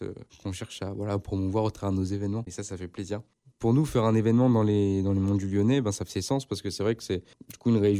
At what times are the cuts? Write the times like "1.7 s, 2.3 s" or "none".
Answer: 2.5 s